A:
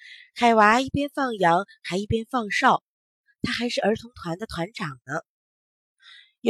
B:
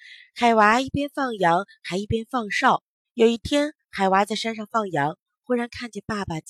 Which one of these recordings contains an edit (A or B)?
B